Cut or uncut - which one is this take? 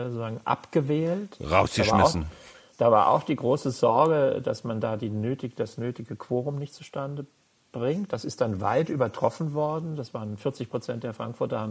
uncut